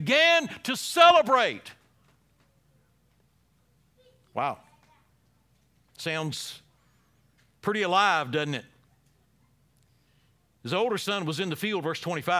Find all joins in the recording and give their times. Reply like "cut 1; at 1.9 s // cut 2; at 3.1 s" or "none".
none